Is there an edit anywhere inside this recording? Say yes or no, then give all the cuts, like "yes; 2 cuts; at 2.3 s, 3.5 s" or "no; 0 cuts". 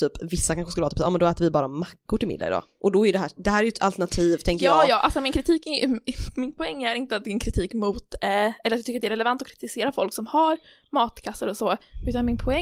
no; 0 cuts